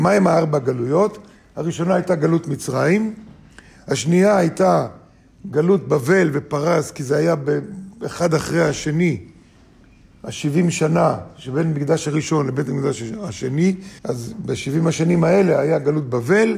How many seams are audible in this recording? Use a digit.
1